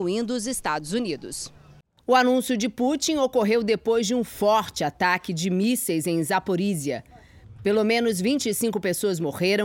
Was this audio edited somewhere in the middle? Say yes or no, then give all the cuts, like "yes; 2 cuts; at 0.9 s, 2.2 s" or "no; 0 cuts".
no; 0 cuts